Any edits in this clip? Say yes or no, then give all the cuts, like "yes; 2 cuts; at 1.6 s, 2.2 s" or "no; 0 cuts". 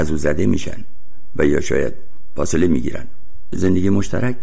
yes; 1 cut; at 3.5 s